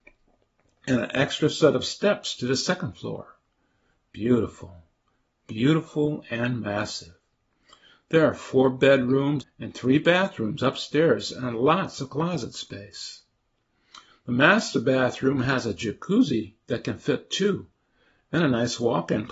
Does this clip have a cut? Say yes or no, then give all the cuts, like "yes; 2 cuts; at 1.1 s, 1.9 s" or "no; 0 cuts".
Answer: yes; 1 cut; at 9.4 s